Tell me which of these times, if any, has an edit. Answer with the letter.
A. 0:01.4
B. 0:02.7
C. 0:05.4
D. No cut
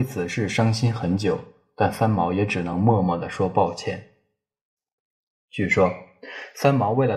D